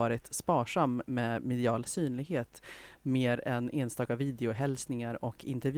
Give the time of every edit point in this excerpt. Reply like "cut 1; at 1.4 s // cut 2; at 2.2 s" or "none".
none